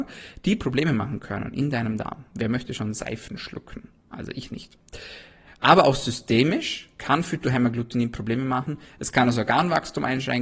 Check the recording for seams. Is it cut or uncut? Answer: cut